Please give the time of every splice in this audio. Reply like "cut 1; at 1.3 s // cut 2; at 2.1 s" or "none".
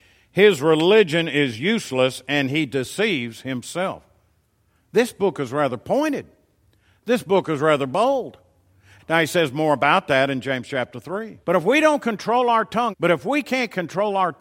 cut 1; at 9.0 s // cut 2; at 11.4 s // cut 3; at 12.9 s